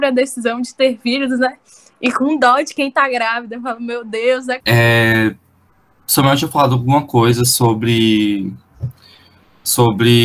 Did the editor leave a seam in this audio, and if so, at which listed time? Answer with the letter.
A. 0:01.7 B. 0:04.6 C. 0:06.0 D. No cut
B